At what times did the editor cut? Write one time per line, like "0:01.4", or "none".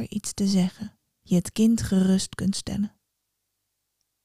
0:01.2